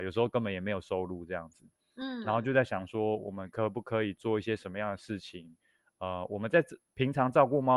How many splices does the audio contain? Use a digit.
0